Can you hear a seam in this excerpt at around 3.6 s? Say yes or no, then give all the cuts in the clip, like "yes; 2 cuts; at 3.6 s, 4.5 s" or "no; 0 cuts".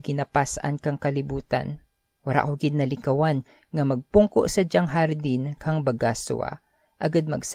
no; 1 cut; at 2.2 s